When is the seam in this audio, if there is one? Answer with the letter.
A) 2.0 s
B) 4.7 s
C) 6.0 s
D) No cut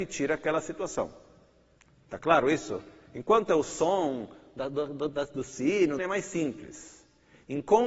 C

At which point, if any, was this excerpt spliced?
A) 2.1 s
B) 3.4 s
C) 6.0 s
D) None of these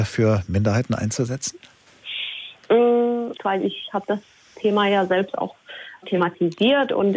B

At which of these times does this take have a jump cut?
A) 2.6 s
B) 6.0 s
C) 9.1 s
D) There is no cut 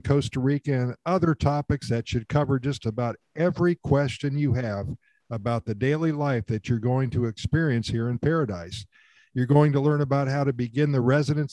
D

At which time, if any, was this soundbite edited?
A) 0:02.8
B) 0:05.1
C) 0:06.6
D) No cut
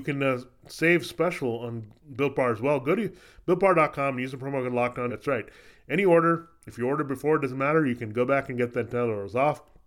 B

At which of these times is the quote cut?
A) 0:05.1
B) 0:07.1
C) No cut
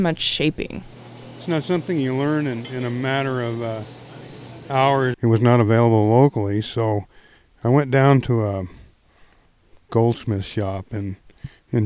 A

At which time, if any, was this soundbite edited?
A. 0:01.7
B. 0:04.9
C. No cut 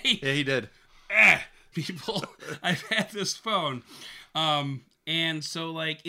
A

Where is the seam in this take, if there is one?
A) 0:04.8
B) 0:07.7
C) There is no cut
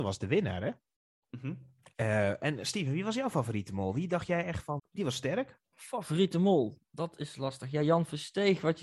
A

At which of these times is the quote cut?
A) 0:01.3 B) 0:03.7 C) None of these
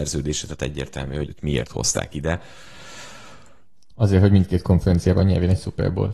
A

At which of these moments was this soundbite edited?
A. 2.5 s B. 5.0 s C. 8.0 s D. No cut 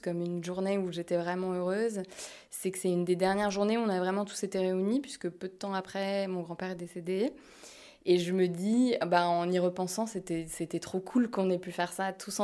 D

